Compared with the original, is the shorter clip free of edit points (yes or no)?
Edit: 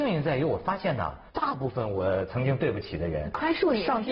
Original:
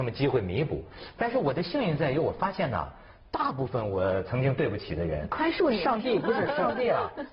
no